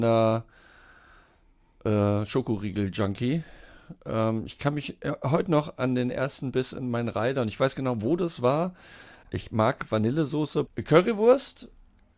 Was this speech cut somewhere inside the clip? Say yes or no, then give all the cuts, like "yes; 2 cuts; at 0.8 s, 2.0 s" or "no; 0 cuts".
yes; 2 cuts; at 9.2 s, 10.7 s